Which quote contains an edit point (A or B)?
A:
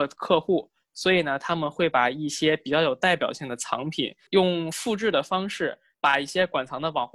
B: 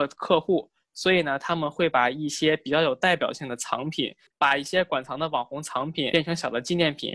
B